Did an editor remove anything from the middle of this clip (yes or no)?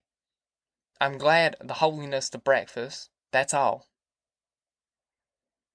yes